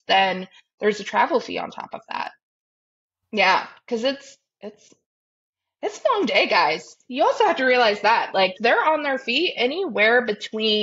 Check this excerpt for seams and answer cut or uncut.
cut